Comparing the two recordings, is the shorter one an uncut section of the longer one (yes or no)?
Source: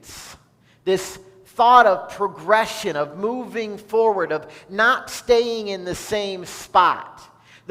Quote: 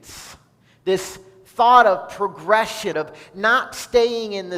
no